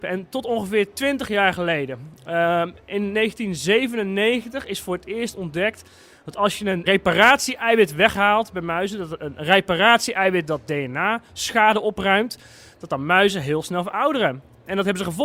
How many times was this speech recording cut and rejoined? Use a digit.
1